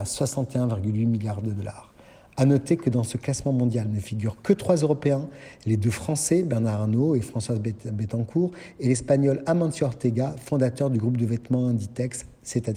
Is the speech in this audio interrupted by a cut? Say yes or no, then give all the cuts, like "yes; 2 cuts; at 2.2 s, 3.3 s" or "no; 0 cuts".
no; 0 cuts